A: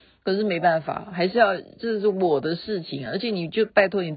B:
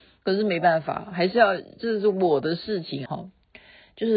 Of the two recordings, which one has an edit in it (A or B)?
B